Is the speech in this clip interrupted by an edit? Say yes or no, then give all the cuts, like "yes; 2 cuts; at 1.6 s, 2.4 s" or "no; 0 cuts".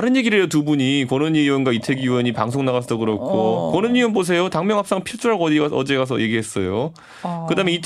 no; 0 cuts